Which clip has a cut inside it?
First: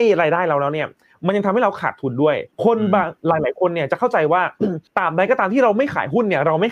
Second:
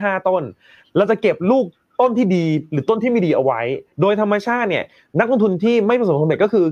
first; 2 cuts; at 2.5 s, 4.9 s

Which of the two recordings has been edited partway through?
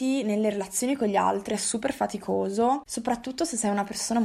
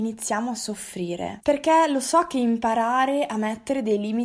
second; 1 cut; at 1.4 s

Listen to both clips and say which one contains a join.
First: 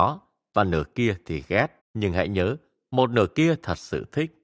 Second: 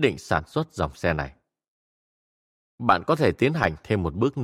first; 1 cut; at 1.8 s

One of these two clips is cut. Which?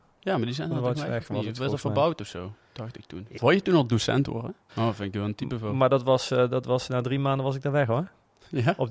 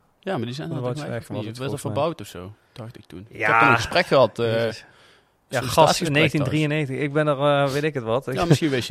first; 2 cuts; at 3.4 s, 4.7 s

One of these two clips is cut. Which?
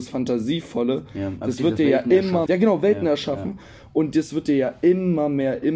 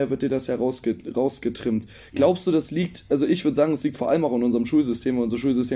first; 1 cut; at 2.5 s

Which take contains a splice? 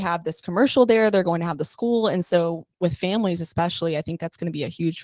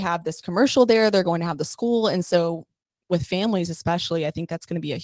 first; 1 cut; at 2.7 s

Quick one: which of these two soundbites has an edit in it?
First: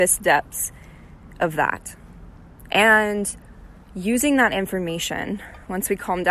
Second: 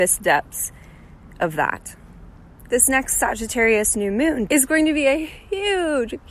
second; 2 cuts; at 2.7 s, 4.5 s

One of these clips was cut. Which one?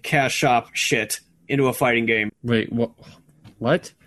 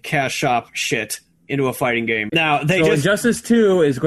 second; 1 cut; at 2.3 s

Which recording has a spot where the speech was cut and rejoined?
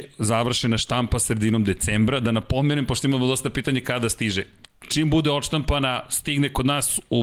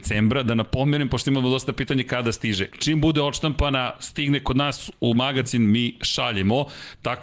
second; 1 cut; at 2.7 s

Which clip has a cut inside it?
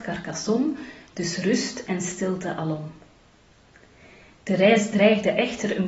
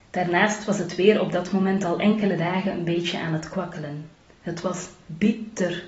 second; 1 cut; at 4.4 s

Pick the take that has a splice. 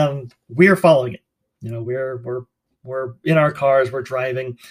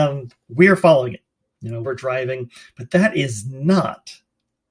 second; 1 cut; at 1.8 s

